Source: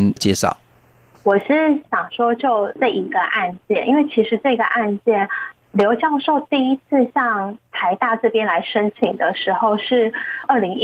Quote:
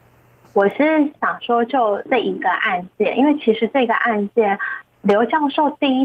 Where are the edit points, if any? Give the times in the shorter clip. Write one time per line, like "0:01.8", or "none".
none